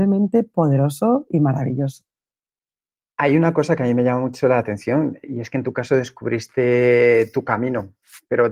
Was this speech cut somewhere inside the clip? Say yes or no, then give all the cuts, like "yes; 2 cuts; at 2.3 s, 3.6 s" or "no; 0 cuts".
yes; 1 cut; at 5.2 s